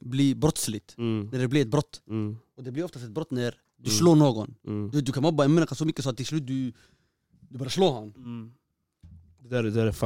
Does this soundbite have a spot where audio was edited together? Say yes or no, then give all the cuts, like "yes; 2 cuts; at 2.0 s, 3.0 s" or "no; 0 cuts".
no; 0 cuts